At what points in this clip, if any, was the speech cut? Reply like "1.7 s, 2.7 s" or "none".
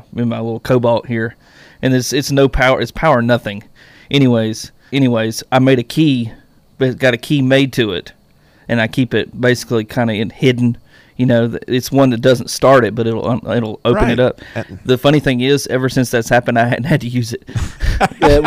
4.9 s